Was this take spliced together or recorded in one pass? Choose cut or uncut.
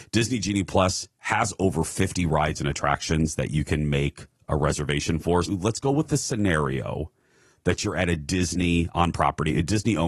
cut